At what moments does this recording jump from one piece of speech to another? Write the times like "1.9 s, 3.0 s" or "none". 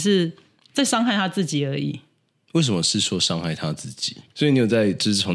4.3 s